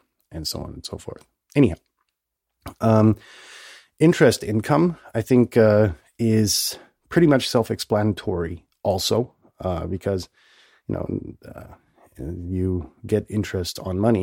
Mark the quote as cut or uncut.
uncut